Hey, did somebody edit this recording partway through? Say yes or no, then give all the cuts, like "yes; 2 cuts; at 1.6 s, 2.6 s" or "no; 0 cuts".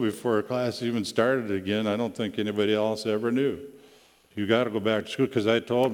yes; 1 cut; at 4.3 s